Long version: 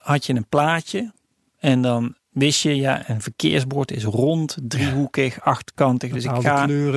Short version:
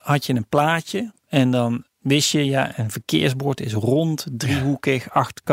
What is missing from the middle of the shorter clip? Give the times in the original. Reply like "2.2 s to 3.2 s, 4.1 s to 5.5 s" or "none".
1.2 s to 1.5 s